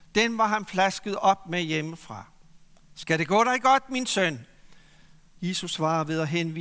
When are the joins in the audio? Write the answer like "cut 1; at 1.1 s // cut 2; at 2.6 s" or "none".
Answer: cut 1; at 5.4 s